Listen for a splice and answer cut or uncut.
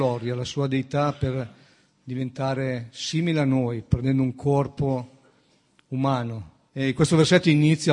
cut